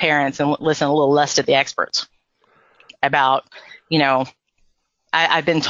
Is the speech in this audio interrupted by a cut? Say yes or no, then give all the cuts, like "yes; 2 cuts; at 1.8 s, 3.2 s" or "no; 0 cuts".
yes; 1 cut; at 2.9 s